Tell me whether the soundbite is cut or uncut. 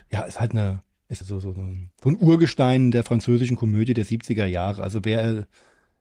cut